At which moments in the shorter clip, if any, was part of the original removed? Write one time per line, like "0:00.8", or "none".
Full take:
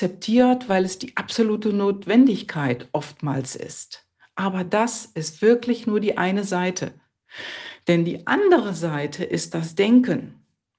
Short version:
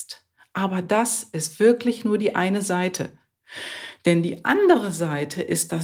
none